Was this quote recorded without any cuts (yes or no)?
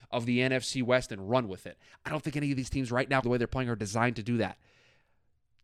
no